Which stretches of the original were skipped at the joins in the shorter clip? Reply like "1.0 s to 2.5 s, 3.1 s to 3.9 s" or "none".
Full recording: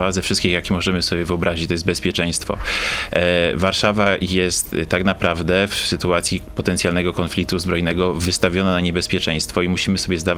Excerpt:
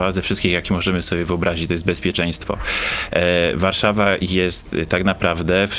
none